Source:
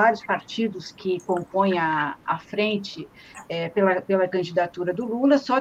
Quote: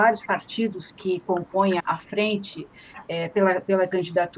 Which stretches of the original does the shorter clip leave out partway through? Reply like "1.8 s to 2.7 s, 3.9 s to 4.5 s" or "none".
1.8 s to 2.2 s